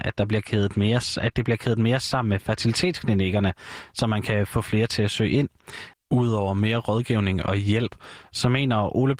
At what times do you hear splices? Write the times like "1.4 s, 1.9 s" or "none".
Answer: 5.9 s